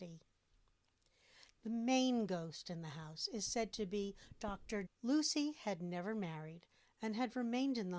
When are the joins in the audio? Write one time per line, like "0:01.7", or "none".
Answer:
0:04.8

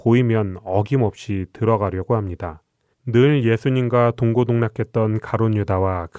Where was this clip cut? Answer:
0:02.9

